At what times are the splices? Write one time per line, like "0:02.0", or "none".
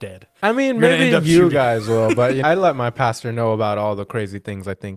0:02.4